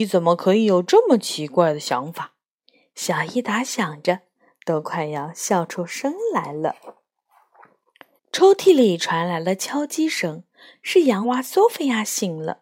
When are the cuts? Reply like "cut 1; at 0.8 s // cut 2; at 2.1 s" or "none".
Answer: cut 1; at 8.2 s // cut 2; at 11.2 s